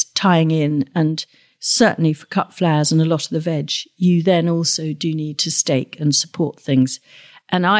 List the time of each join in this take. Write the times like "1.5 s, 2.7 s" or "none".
none

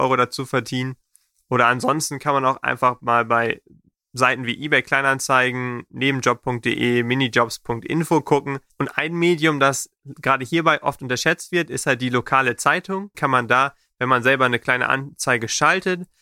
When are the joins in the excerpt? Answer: 8.7 s, 13.1 s

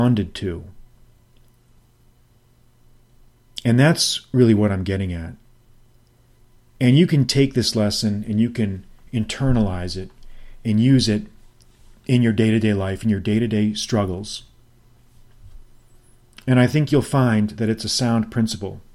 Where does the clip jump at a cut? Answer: none

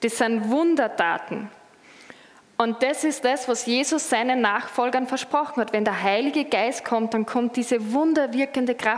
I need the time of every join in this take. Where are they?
none

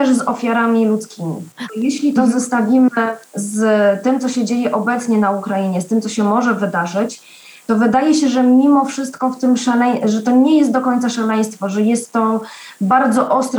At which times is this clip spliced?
1.7 s

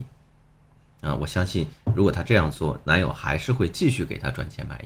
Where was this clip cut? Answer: none

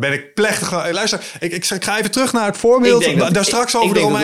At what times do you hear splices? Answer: none

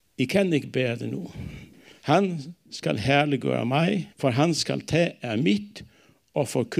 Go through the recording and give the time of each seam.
1.9 s, 4.1 s

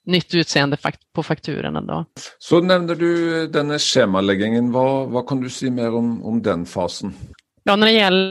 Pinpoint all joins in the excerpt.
5.1 s

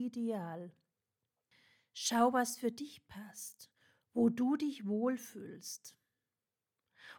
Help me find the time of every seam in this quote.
none

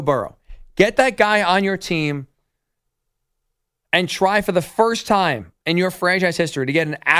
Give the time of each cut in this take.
5.6 s

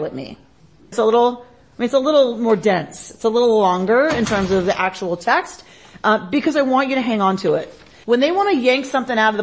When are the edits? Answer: 0.9 s, 8.0 s

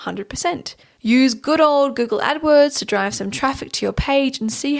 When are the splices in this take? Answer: none

